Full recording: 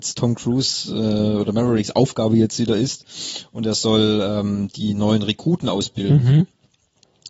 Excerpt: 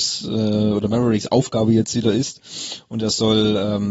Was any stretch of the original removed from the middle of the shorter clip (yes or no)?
no